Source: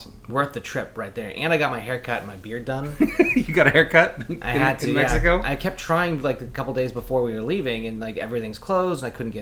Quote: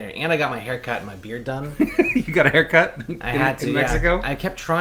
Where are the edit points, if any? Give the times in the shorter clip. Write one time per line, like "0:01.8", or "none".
none